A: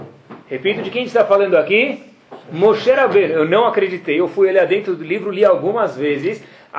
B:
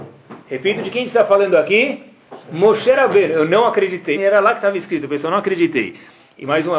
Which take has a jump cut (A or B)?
B